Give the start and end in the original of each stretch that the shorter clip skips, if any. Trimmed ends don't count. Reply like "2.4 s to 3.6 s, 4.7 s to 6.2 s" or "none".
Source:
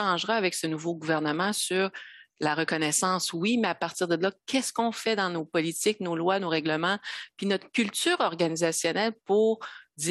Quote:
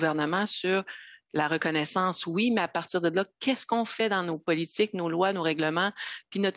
none